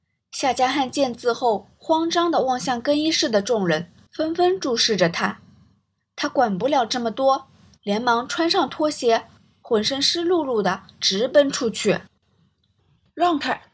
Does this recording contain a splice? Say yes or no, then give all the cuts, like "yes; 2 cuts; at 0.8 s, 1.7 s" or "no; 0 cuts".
yes; 1 cut; at 4.1 s